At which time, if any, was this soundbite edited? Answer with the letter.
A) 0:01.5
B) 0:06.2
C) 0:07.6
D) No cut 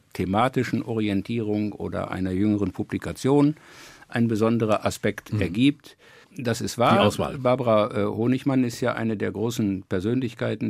B